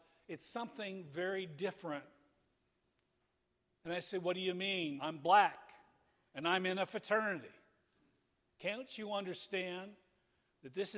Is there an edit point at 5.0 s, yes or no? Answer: yes